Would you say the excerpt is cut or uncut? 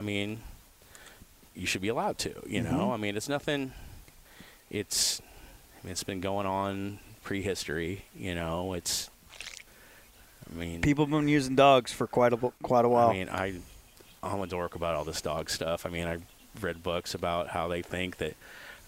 uncut